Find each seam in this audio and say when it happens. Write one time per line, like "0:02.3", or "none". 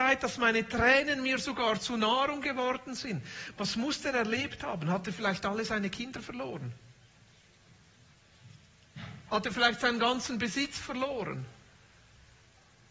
none